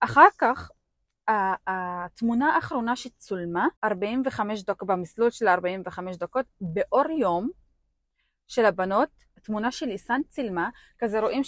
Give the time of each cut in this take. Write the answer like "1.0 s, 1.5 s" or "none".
3.8 s, 9.4 s